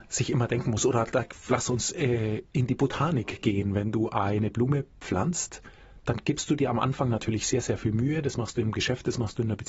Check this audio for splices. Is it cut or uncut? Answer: uncut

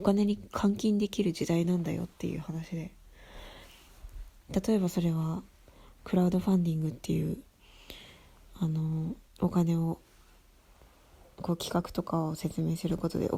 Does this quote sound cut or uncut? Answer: cut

